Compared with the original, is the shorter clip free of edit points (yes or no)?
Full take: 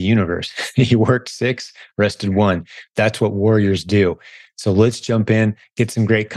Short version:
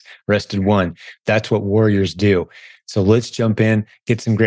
yes